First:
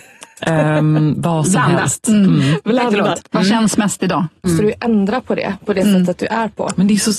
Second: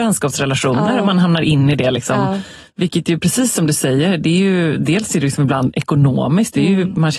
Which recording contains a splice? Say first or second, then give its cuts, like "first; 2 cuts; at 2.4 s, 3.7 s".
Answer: first; 1 cut; at 4.4 s